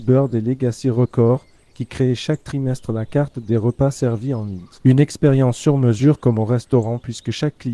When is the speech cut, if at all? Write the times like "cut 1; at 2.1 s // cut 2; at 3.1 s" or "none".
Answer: cut 1; at 4.8 s

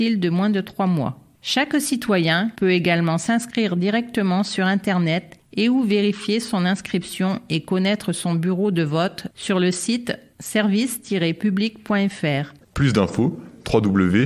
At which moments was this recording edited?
cut 1; at 2.5 s // cut 2; at 12.6 s

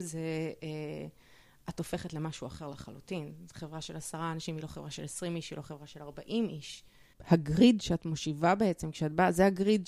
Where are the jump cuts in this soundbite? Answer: none

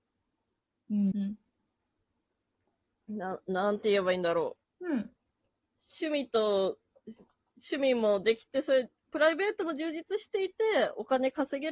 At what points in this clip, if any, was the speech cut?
cut 1; at 1.1 s // cut 2; at 4.6 s

